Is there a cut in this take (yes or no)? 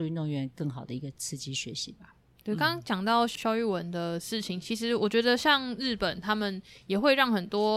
no